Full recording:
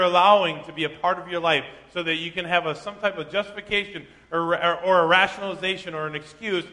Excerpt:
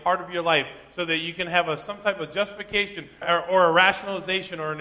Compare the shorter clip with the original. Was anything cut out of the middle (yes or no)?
yes